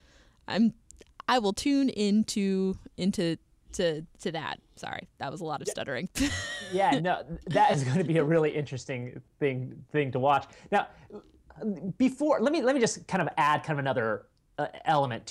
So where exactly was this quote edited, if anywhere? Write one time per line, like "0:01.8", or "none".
none